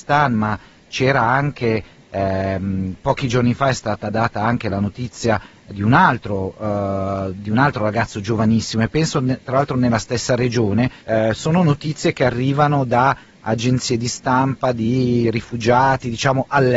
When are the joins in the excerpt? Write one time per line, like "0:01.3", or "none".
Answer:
0:11.0